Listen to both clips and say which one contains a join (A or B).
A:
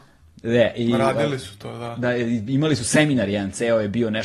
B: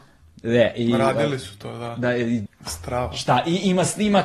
B